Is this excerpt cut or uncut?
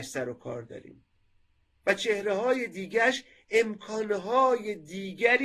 uncut